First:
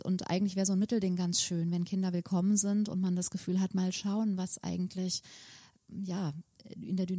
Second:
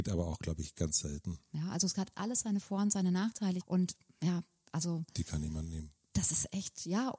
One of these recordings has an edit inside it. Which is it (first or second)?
second